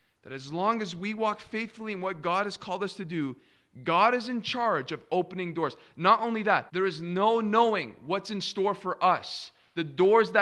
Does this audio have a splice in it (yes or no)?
yes